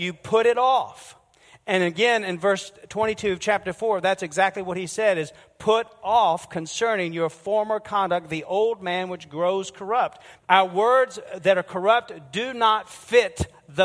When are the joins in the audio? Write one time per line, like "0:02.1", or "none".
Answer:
0:10.4